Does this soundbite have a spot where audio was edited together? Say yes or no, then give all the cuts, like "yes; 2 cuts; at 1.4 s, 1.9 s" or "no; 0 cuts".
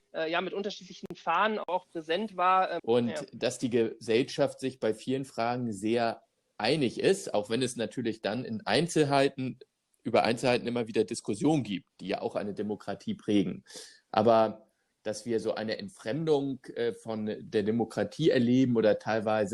yes; 1 cut; at 2.8 s